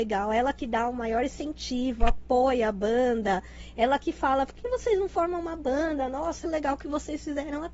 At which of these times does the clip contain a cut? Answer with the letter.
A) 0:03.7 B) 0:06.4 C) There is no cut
B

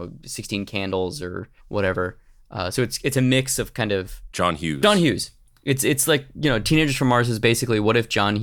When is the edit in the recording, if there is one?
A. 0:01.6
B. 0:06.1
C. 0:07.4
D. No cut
A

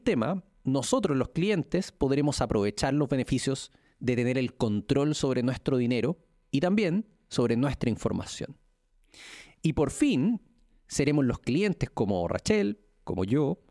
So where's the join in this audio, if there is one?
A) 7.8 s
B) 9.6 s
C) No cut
B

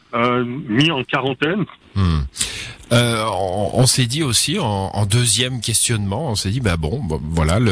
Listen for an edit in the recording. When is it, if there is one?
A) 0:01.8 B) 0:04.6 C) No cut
A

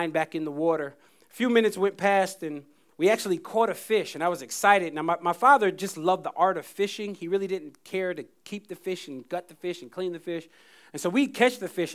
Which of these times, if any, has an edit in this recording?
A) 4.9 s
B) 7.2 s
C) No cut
C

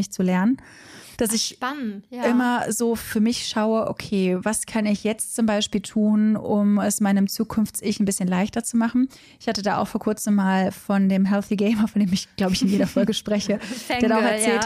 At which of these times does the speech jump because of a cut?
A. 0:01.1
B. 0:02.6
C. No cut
A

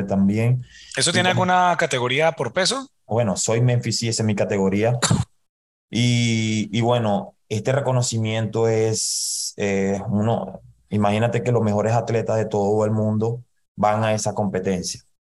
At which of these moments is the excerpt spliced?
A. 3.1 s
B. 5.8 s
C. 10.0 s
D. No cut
A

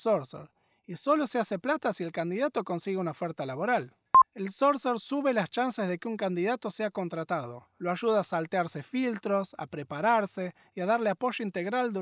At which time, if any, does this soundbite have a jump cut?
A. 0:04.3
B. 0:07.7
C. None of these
C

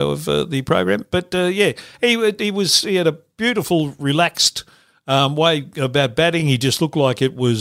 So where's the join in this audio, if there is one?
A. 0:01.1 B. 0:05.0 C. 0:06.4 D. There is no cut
D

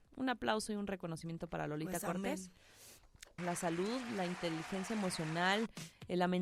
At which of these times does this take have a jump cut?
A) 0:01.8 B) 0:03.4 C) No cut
B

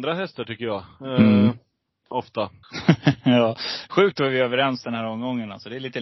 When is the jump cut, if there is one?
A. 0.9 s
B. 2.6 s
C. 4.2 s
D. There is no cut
B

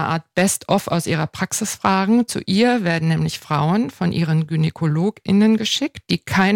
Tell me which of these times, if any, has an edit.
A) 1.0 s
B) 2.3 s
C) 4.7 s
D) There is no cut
D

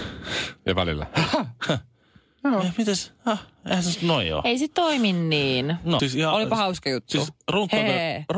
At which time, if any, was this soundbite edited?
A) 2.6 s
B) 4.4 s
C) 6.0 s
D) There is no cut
C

